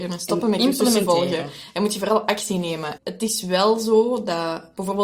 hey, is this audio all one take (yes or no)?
no